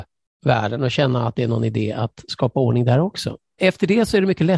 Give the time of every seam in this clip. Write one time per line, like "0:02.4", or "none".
0:03.6